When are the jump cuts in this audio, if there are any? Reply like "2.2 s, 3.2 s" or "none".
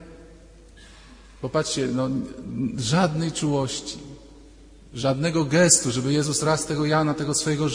none